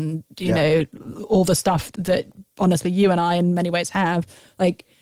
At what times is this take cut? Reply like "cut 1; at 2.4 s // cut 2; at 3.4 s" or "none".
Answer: cut 1; at 1.9 s